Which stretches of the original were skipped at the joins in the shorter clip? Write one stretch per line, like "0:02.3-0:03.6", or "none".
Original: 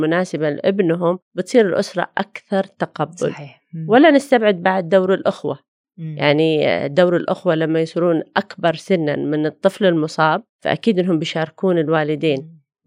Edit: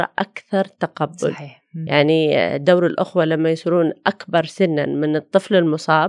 0:03.9-0:06.2